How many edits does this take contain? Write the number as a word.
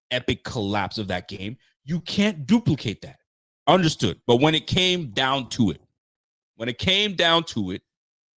one